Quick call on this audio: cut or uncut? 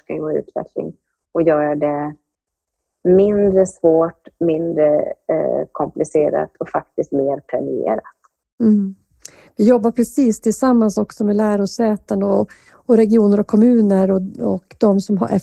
uncut